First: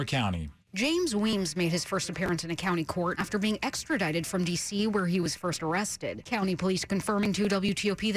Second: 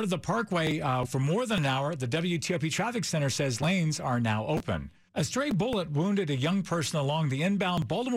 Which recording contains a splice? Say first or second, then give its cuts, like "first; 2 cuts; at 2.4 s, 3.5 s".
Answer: second; 2 cuts; at 1.0 s, 5.1 s